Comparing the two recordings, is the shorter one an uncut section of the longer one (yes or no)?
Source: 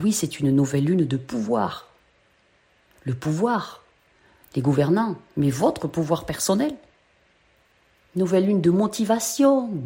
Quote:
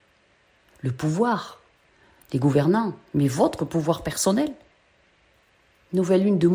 yes